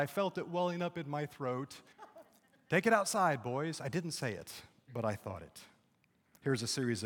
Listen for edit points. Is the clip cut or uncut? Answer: cut